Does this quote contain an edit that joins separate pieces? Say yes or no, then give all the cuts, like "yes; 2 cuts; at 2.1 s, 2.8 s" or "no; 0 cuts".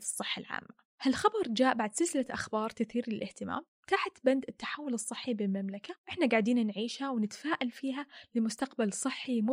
yes; 1 cut; at 0.9 s